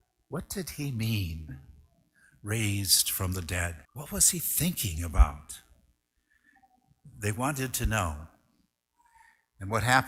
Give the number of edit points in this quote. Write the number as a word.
one